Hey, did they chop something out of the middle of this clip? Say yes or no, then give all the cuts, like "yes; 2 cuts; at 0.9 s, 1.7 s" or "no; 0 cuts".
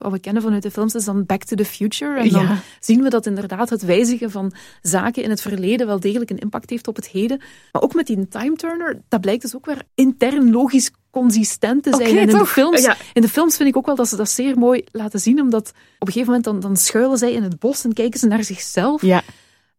no; 0 cuts